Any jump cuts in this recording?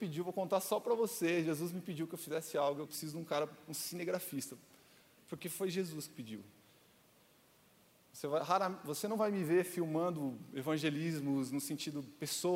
yes; 1 cut; at 2.9 s

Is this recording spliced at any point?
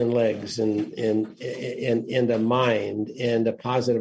no; 0 cuts

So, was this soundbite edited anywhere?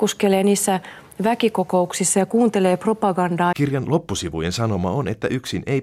yes; 1 cut; at 3.5 s

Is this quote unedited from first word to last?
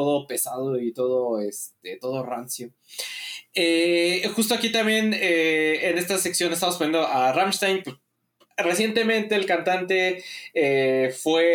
no; 1 cut; at 7.8 s

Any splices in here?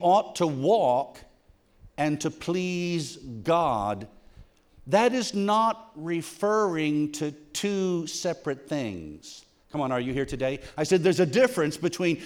yes; 1 cut; at 9.6 s

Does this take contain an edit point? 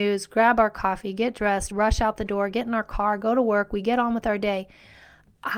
no; 0 cuts

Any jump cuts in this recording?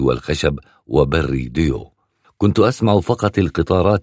no; 0 cuts

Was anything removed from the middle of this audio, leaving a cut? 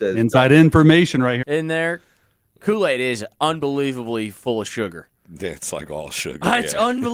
yes; 1 cut; at 1.4 s

